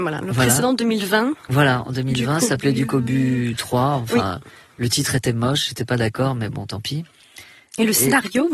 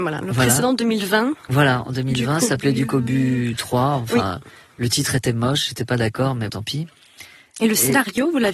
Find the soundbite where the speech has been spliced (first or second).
second